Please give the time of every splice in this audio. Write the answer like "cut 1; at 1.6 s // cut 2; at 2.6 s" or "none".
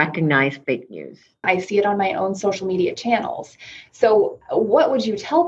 cut 1; at 1.4 s